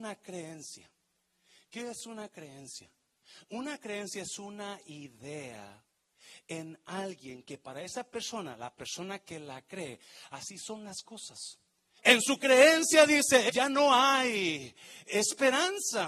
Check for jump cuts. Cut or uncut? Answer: cut